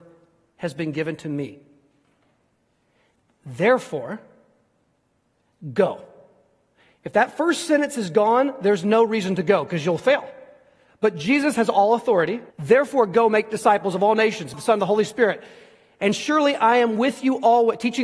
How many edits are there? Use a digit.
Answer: 2